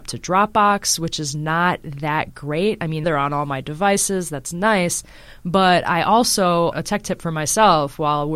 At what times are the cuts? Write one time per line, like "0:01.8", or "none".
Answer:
0:03.0
0:06.7